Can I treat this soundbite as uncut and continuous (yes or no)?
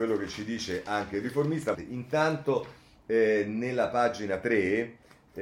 no